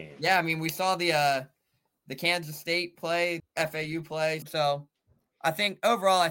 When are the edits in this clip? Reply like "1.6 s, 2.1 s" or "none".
3.4 s, 4.4 s